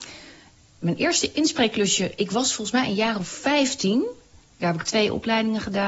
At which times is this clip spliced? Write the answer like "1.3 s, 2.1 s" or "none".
4.6 s